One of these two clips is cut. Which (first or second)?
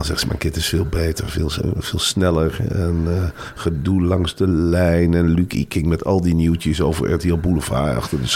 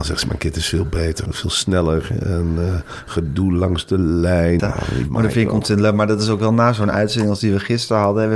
second